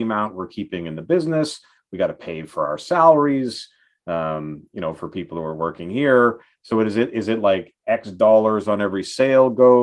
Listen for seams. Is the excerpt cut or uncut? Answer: uncut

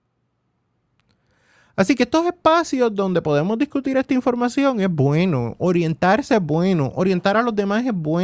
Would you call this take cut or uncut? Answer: uncut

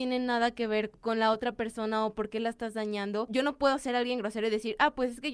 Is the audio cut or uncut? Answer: uncut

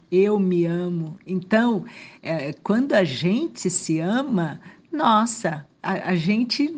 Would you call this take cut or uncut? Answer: uncut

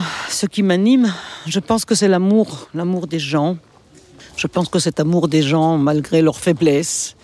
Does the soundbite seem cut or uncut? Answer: uncut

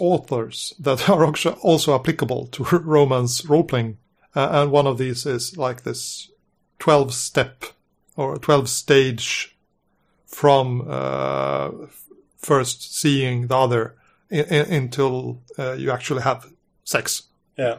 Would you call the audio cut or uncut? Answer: uncut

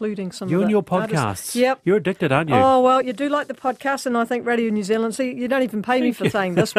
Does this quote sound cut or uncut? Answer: uncut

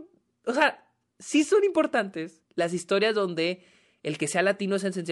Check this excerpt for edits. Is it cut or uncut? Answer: cut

